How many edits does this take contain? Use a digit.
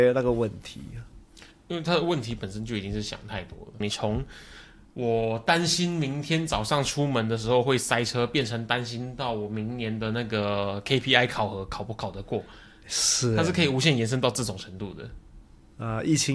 1